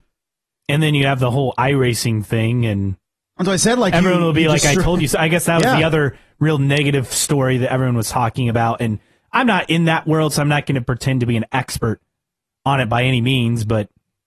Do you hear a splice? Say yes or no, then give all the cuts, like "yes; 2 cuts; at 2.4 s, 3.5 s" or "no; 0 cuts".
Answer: no; 0 cuts